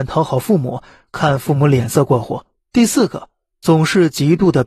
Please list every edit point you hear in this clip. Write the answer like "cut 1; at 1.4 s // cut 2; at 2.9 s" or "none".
cut 1; at 2.6 s